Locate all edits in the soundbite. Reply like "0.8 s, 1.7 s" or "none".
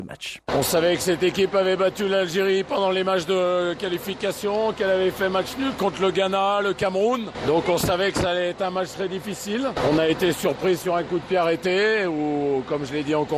none